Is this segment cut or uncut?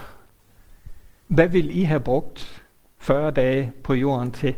cut